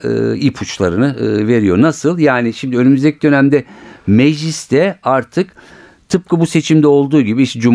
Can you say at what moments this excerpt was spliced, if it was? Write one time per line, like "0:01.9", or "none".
none